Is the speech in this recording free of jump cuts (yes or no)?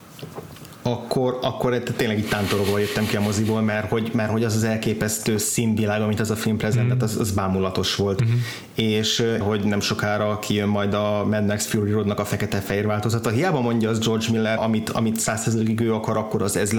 no